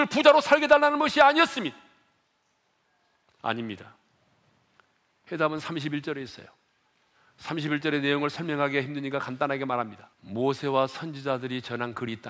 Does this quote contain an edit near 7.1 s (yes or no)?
no